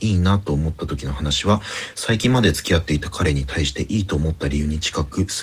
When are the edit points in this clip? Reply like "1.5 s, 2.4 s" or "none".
none